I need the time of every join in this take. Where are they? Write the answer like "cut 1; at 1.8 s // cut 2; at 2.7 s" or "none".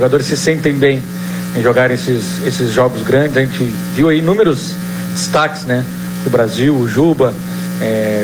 none